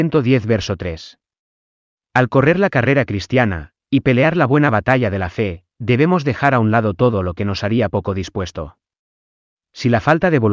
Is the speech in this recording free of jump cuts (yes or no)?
yes